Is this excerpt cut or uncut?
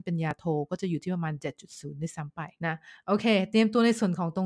cut